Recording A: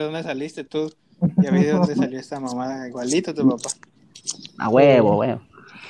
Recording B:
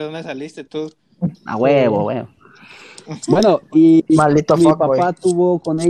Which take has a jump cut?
B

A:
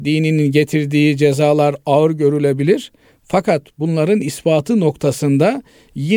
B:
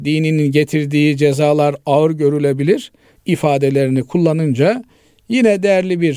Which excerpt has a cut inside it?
B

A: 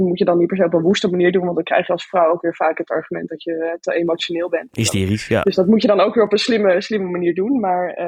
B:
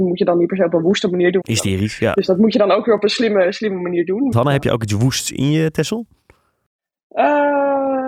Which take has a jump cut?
B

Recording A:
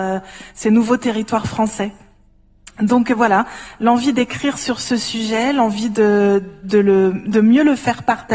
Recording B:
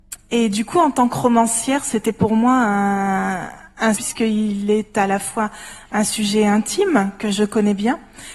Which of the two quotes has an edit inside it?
B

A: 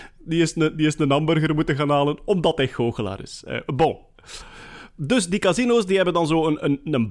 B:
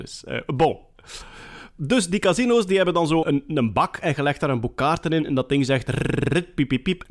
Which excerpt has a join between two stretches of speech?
B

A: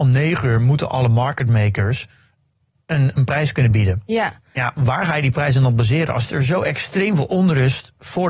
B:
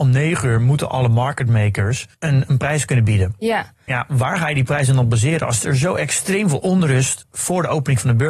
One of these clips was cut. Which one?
B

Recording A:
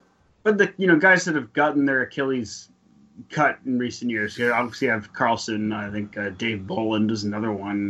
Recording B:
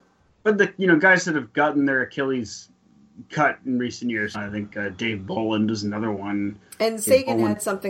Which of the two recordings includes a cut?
B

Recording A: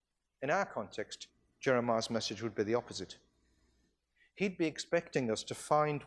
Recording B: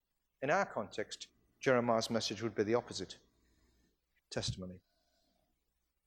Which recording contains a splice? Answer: B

